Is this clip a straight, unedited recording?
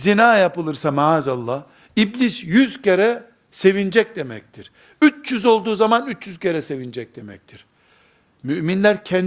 yes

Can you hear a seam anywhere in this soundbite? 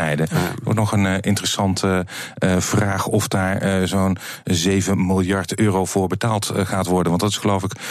no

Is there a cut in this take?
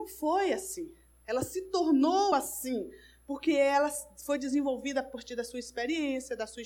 no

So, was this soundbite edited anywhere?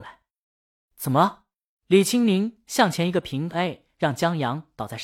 no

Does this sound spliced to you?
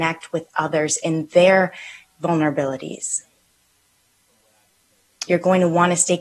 yes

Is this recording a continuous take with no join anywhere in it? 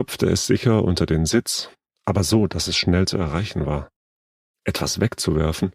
no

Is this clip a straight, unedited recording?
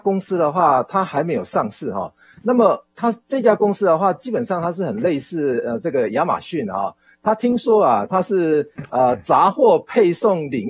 no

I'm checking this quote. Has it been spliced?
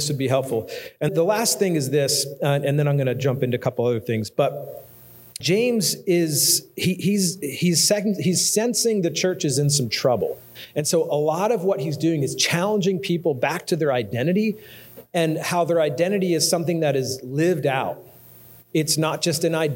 yes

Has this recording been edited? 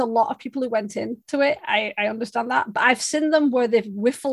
no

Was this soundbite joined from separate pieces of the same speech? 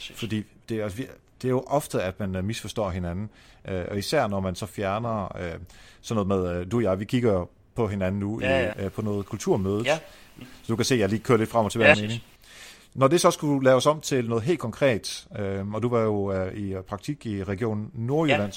yes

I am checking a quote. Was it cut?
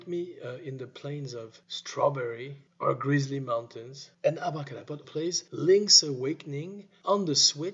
yes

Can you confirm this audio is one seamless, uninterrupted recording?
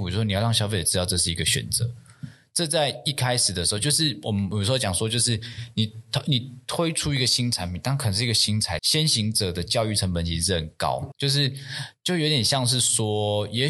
no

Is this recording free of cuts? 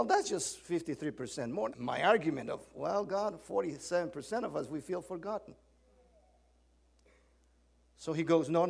no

